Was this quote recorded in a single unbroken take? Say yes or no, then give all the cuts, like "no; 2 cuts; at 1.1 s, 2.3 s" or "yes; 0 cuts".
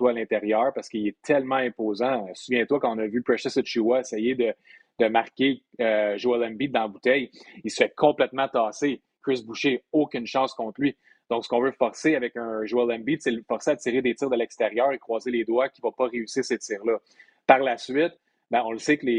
yes; 0 cuts